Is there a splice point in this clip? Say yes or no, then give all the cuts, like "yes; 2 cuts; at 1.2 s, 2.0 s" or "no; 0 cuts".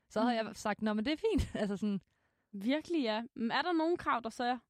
no; 0 cuts